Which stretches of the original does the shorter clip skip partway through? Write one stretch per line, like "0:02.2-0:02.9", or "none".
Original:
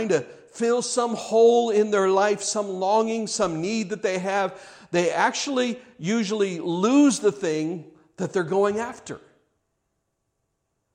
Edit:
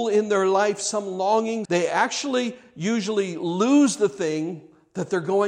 0:03.3-0:04.9